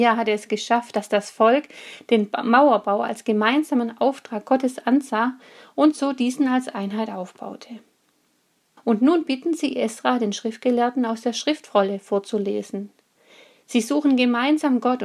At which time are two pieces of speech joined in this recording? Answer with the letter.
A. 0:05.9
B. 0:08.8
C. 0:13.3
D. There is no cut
B